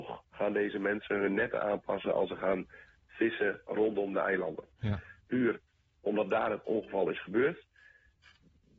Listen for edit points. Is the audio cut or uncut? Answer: cut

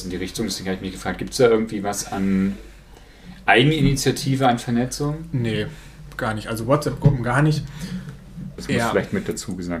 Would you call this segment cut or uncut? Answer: cut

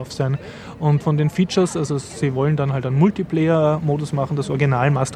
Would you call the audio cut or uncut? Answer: cut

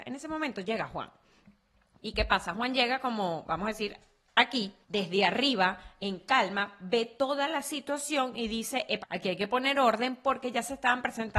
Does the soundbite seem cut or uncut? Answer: cut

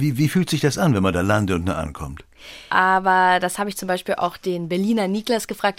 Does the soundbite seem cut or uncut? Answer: cut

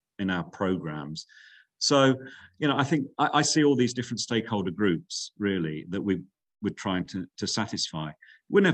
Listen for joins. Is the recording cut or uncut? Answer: uncut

